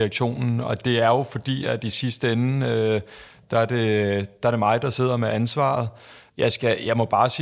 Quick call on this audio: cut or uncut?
uncut